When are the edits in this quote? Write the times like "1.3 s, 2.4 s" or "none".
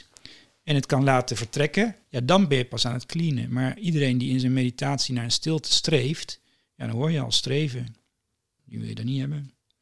2.0 s, 8.6 s